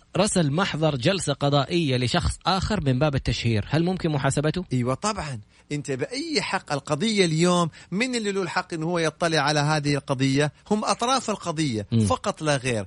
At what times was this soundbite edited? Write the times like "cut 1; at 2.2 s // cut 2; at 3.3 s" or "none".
cut 1; at 4.7 s